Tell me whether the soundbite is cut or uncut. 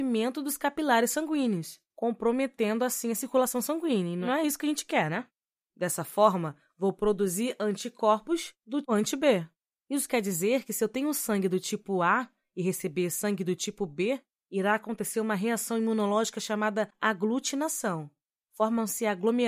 cut